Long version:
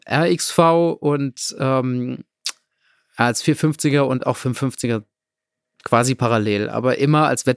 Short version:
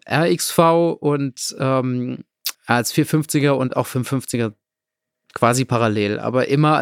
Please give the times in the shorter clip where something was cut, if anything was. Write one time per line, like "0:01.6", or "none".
0:02.5